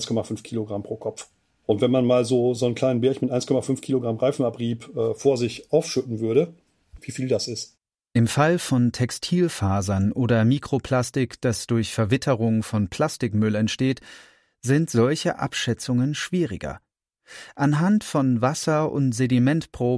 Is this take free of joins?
no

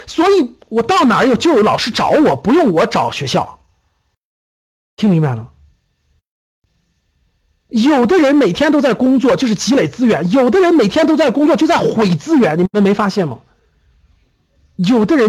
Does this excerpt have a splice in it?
no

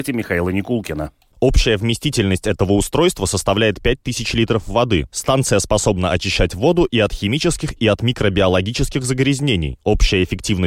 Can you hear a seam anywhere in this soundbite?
yes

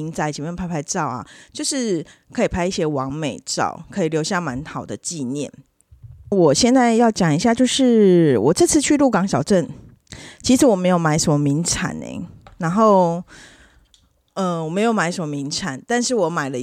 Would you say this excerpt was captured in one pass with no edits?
no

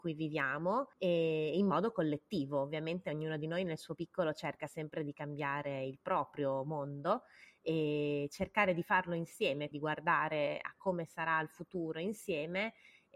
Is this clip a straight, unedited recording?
no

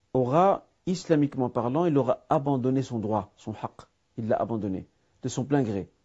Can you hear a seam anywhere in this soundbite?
no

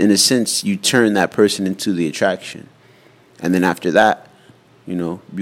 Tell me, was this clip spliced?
no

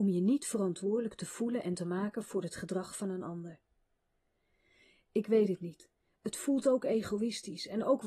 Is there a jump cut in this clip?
no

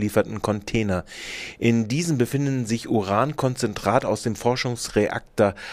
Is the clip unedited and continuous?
yes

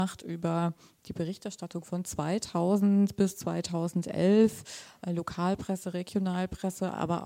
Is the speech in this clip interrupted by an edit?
no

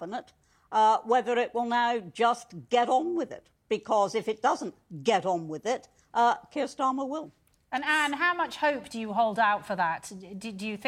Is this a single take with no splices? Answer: yes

